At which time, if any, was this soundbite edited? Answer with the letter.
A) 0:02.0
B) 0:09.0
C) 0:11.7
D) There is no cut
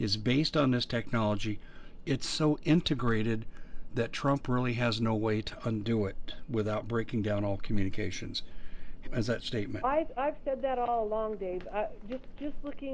B